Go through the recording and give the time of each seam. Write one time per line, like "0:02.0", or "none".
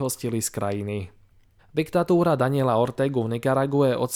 0:01.6